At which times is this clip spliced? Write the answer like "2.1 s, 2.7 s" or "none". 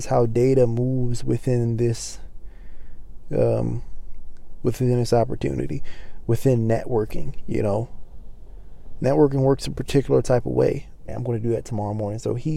11.1 s

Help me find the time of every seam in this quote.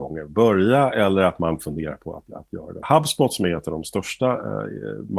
2.8 s

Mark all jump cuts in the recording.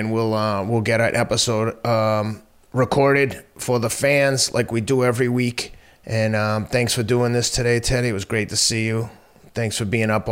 none

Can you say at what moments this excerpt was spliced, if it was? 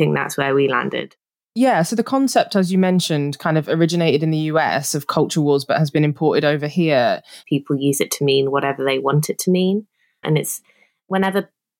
7.4 s, 10.2 s

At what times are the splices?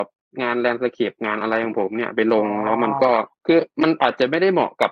3.3 s

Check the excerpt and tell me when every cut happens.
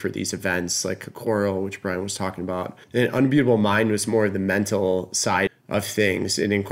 2.8 s, 5.5 s

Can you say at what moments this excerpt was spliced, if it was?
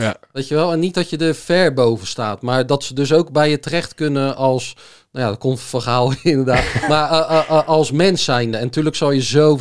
none

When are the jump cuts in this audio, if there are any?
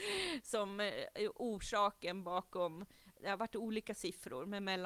none

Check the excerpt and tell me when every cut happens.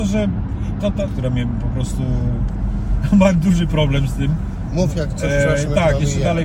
1.1 s

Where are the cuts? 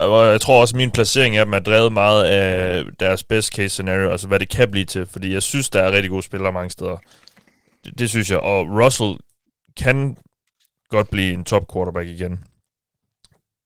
8.4 s

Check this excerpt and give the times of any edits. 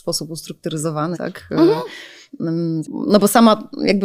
1.1 s, 2.8 s

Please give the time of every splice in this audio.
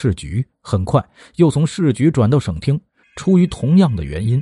3.0 s

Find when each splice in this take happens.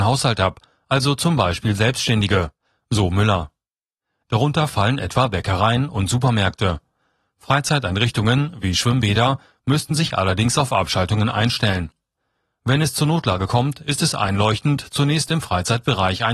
4.3 s

